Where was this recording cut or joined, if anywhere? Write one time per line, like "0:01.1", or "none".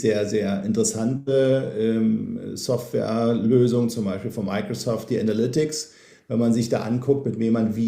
none